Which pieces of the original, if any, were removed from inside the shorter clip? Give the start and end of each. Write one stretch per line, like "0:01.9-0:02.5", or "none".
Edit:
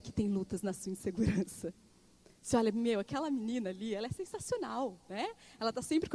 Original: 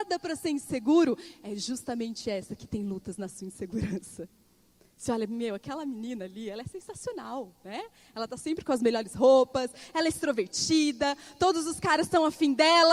none